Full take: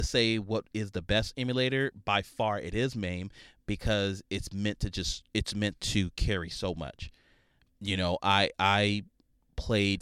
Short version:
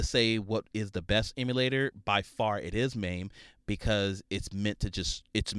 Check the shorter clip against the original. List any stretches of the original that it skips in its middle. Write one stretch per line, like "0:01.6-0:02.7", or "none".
none